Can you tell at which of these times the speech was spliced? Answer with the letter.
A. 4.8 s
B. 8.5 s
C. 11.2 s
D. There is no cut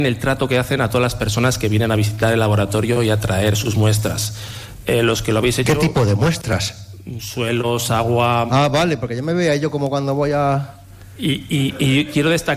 D